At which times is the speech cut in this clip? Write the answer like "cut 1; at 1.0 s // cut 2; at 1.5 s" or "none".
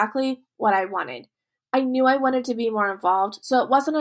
cut 1; at 1.6 s